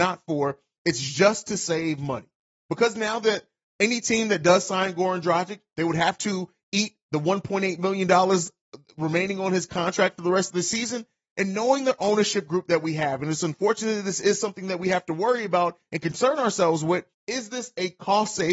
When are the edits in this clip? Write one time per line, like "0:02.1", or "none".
0:17.1